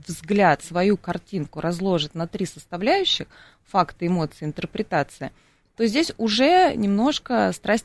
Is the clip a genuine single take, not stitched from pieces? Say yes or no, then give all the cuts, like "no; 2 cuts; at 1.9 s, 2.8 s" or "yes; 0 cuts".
yes; 0 cuts